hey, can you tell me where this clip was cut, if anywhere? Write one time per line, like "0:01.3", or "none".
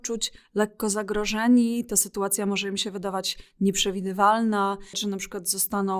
0:04.9